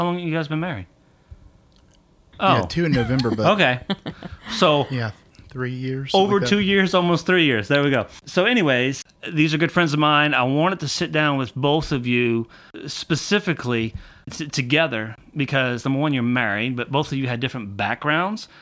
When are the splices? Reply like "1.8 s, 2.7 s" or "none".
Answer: 2.3 s